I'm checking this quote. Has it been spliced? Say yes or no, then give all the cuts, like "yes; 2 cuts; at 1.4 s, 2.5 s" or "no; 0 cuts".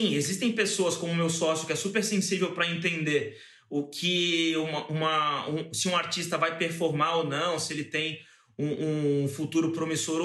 no; 0 cuts